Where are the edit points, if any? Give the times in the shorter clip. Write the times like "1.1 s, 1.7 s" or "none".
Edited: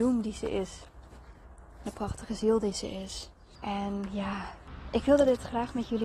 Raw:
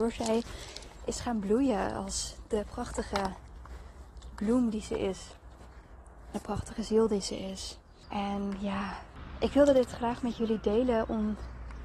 none